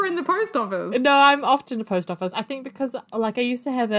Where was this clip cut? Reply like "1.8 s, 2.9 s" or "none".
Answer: none

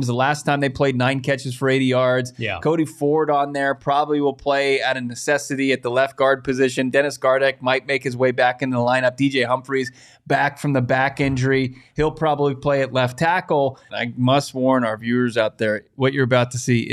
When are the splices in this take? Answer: 13.9 s

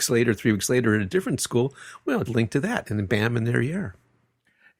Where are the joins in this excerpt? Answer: 2.3 s

